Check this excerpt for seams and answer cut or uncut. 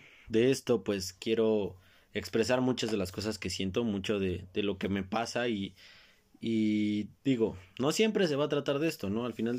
uncut